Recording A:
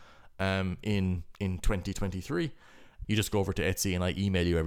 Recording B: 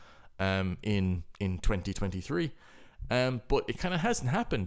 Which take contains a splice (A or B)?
A